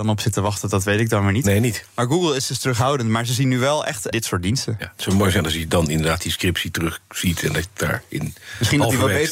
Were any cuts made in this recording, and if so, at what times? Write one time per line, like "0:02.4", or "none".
0:04.1